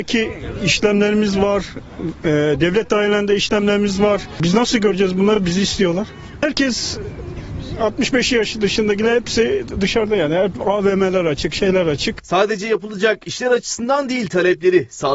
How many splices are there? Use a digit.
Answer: 0